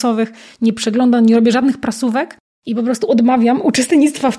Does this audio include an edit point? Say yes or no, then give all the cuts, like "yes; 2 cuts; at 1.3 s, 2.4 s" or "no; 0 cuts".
yes; 1 cut; at 1.5 s